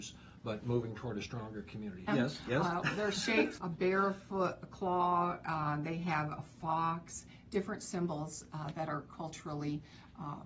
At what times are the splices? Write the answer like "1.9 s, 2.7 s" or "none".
2.1 s, 3.6 s